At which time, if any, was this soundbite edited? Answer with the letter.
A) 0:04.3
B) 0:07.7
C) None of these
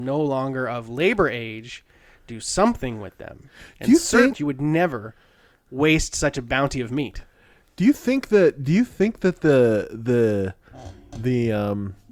A